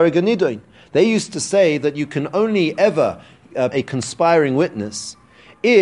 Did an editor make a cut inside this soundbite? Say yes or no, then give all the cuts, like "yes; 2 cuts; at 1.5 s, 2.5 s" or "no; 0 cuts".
yes; 1 cut; at 3.7 s